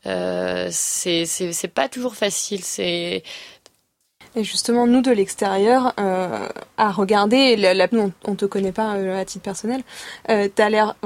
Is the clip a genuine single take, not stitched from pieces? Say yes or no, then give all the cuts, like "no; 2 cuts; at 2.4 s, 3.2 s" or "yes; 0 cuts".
no; 2 cuts; at 3.6 s, 7.9 s